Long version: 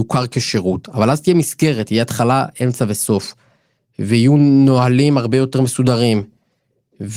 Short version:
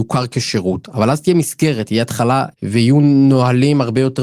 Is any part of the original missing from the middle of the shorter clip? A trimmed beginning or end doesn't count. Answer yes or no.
yes